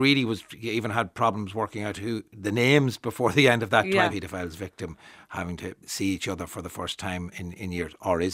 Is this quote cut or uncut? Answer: cut